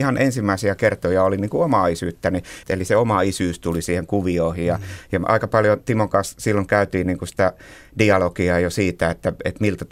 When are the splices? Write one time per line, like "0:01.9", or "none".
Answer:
0:02.6